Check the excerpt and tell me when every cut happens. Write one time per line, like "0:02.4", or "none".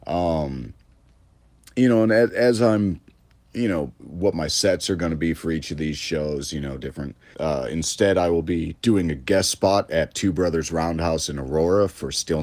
0:04.0
0:07.3
0:08.8

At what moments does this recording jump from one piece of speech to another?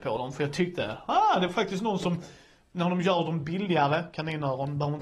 none

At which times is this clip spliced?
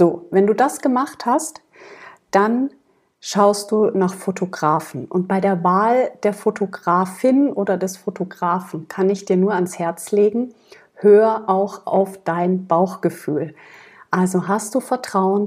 none

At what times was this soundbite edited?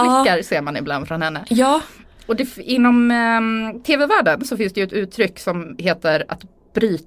none

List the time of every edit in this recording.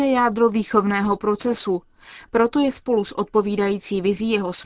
none

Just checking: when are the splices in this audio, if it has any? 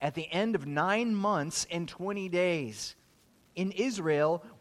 0:03.5

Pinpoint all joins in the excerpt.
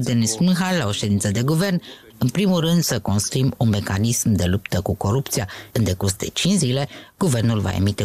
0:02.1
0:05.7

